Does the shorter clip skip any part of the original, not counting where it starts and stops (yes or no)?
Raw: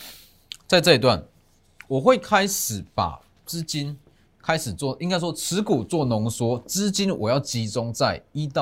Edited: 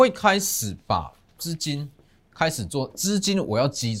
yes